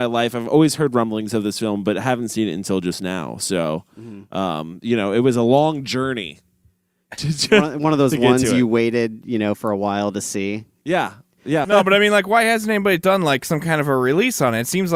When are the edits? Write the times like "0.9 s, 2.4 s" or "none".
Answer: 11.6 s